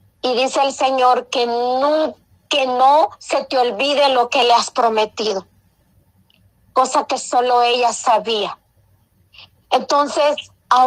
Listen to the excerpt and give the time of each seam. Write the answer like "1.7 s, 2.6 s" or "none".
none